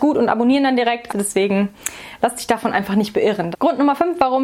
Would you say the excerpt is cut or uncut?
cut